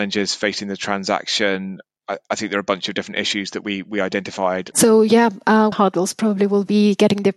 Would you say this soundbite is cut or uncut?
cut